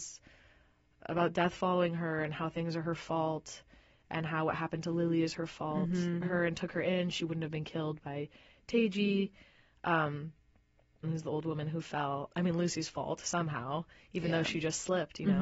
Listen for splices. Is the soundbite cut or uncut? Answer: cut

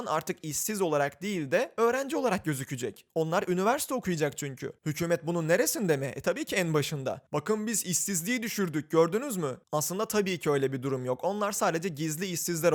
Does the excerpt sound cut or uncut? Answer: cut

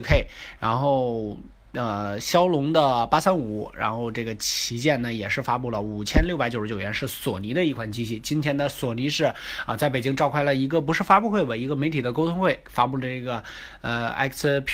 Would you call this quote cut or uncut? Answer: uncut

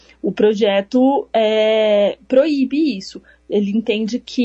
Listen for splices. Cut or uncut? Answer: uncut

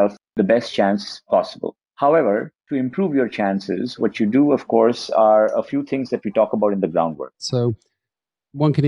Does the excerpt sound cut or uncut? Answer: cut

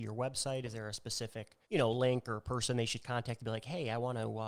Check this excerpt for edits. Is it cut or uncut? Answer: cut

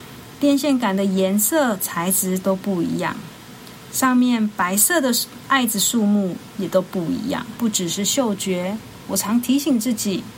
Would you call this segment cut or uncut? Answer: cut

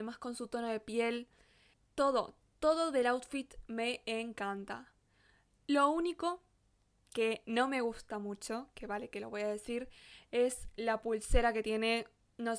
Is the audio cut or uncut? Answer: uncut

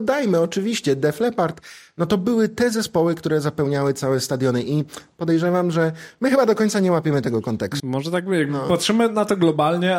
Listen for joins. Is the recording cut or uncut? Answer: cut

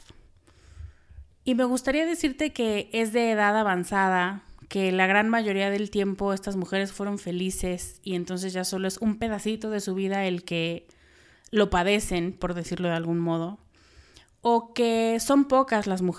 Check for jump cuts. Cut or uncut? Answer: uncut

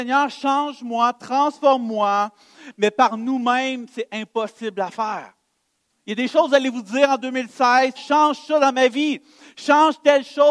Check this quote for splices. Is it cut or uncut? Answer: cut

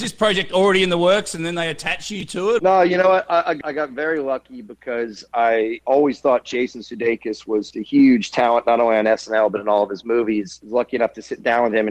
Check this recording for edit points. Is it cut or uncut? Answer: cut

